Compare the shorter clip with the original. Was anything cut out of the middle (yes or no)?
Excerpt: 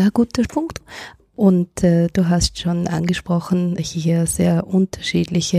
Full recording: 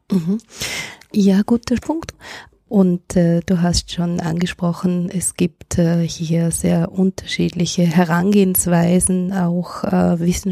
yes